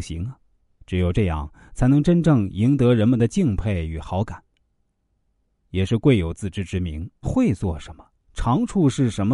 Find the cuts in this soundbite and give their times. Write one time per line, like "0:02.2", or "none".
0:05.6
0:07.2